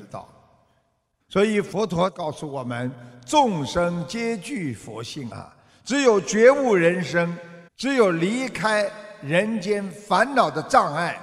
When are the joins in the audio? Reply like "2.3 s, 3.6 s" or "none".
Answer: 1.2 s, 5.3 s, 7.7 s